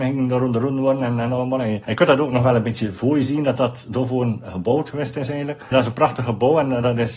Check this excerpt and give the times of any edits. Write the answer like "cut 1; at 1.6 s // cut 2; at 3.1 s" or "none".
none